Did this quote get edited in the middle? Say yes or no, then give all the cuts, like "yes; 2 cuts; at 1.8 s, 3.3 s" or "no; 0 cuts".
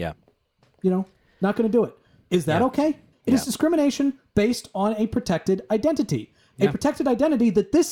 yes; 1 cut; at 3.1 s